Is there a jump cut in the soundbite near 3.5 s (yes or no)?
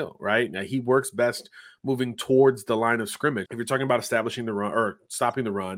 yes